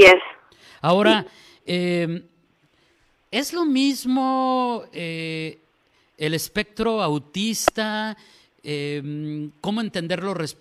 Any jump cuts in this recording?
no; 0 cuts

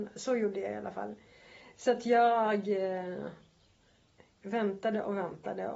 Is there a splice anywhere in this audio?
no; 0 cuts

